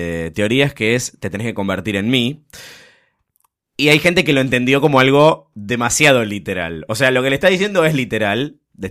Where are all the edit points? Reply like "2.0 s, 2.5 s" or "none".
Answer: none